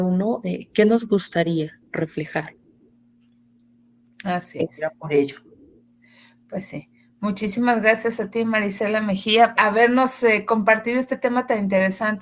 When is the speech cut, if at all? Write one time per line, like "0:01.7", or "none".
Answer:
0:09.6